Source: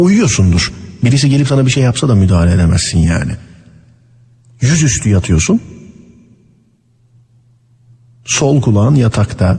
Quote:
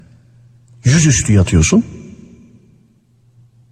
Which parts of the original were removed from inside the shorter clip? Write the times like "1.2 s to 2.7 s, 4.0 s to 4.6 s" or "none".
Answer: none